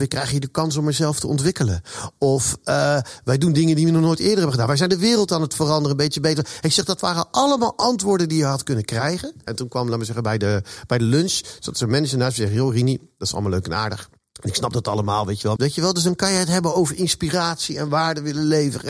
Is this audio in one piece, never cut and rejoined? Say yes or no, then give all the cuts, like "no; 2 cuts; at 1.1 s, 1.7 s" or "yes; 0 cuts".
no; 2 cuts; at 9.5 s, 15.6 s